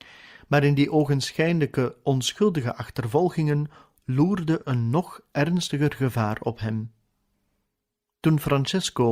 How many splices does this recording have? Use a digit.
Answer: 1